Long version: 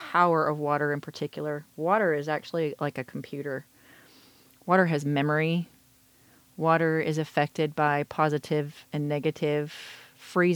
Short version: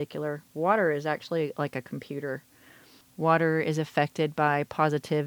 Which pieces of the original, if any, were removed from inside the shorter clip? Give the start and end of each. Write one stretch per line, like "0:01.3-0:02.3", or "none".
0:04.2-0:06.4